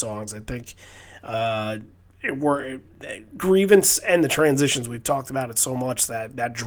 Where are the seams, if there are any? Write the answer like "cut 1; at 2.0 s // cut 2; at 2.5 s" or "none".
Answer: none